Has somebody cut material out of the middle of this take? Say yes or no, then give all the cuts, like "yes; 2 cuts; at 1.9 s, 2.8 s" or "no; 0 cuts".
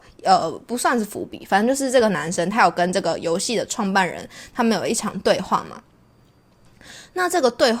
no; 0 cuts